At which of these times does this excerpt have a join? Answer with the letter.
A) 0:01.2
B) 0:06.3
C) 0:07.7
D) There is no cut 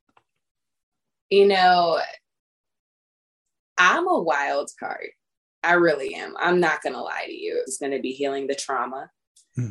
C